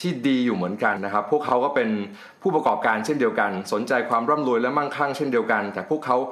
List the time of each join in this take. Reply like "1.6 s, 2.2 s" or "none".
1.0 s